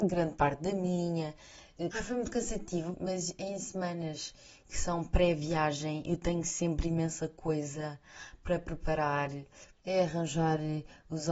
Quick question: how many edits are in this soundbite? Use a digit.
3